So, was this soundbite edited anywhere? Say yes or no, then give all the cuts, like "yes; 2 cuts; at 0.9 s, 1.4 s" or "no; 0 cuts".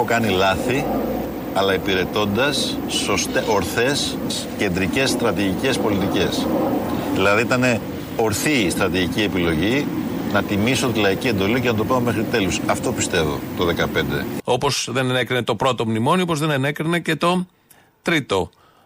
yes; 1 cut; at 14.4 s